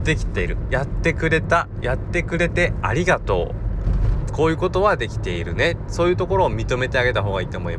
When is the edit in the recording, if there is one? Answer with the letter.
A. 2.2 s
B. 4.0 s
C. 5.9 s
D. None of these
D